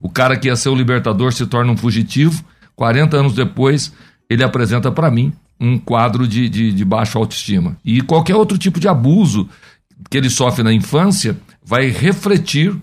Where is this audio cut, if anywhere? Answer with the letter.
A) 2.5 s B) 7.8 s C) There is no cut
B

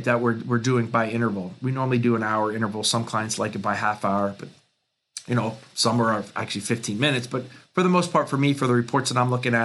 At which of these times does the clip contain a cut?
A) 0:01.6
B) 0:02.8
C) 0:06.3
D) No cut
D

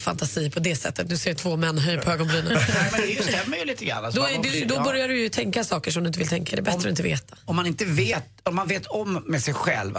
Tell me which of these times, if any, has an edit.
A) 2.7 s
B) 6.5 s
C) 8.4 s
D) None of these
D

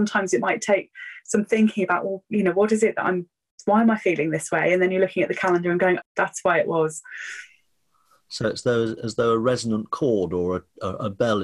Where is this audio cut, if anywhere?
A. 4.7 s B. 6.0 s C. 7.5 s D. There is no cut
B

